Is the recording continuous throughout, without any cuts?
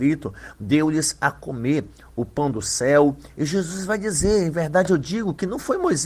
yes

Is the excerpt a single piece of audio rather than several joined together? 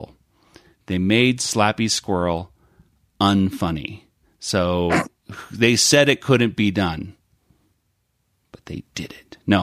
yes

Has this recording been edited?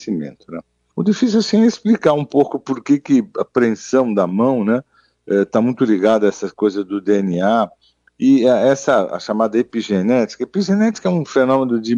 yes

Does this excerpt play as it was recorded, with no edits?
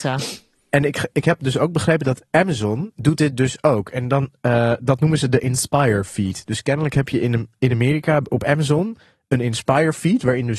yes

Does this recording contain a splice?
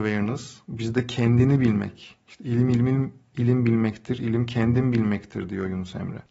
no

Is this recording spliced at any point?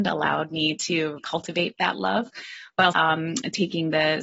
yes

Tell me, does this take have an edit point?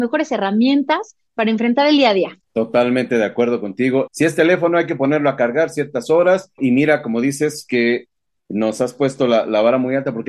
yes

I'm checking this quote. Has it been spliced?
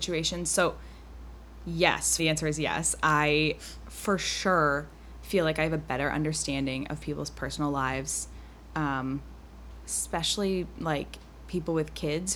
yes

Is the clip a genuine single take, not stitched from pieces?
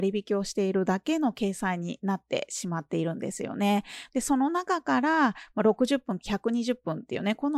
no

